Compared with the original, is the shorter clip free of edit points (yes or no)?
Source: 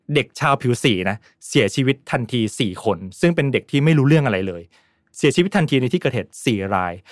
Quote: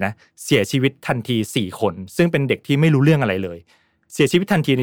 yes